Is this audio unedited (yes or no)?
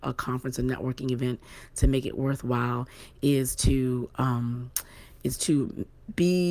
yes